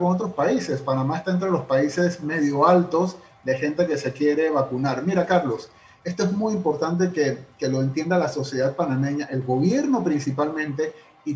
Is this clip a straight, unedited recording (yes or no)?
yes